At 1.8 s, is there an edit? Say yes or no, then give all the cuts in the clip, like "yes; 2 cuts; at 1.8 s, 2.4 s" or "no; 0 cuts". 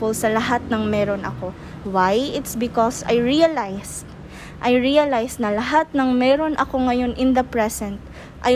yes; 1 cut; at 1.8 s